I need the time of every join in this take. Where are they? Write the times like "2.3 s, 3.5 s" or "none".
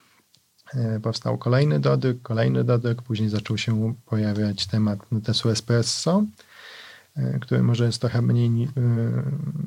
none